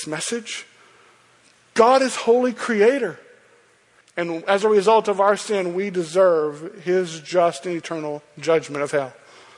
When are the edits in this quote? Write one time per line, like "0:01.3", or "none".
0:04.0